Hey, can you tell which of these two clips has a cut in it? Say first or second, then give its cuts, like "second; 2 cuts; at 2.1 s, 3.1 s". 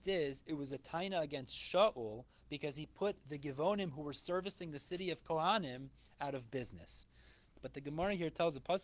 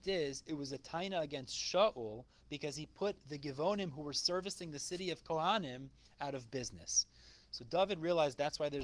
first; 1 cut; at 7.5 s